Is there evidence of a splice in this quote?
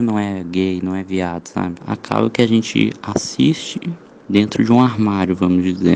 yes; 1 cut; at 1.8 s

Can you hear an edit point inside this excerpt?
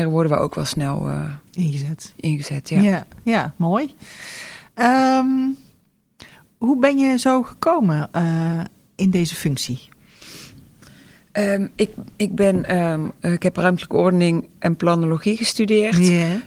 no; 0 cuts

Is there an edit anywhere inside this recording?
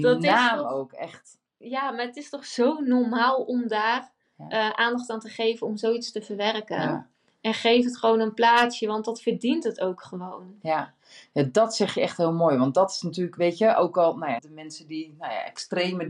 yes; 1 cut; at 14.4 s

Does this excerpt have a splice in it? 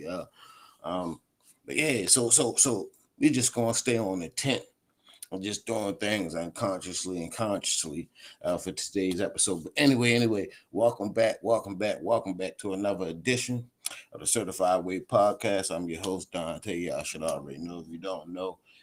no; 0 cuts

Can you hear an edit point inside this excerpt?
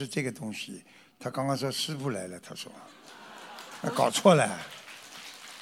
no; 0 cuts

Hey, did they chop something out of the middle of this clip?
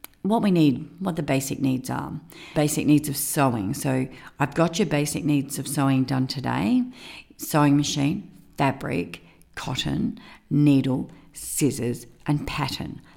yes; 1 cut; at 2.5 s

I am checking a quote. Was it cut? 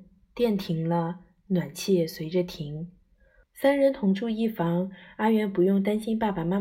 yes; 1 cut; at 3.4 s

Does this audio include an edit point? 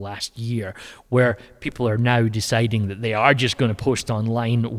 no; 0 cuts

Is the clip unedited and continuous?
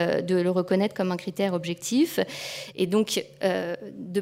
no; 1 cut; at 2.7 s

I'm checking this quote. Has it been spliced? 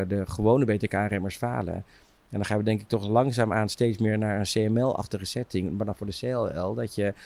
no; 0 cuts

